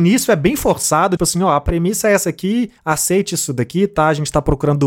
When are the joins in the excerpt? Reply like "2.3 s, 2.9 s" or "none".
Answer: 1.2 s